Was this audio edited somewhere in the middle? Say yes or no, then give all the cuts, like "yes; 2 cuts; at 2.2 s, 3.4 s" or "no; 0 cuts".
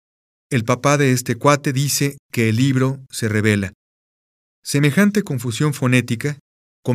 no; 0 cuts